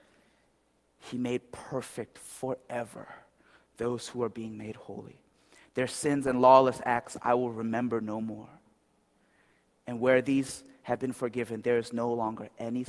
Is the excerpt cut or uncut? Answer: uncut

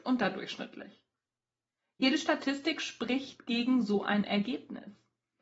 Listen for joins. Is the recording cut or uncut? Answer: uncut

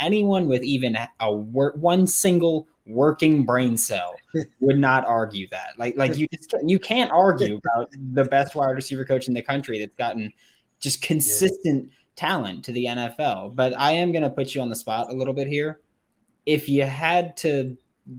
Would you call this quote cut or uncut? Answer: uncut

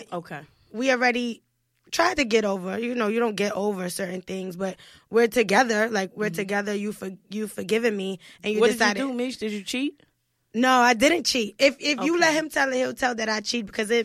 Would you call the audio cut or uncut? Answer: uncut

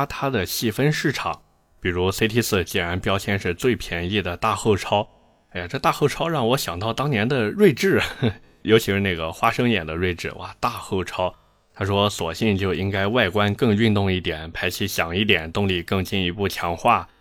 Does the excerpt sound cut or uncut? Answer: uncut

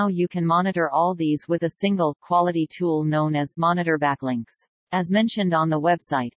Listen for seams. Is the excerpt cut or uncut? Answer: cut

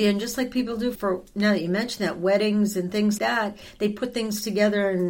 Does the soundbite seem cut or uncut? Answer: cut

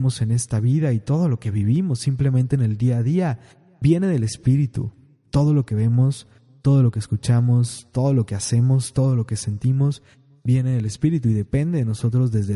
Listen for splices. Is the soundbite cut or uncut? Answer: uncut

